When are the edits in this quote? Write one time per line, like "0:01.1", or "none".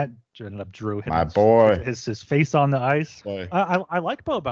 0:03.2